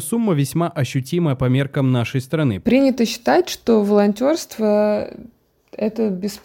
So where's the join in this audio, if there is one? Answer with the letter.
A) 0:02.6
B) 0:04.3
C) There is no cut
A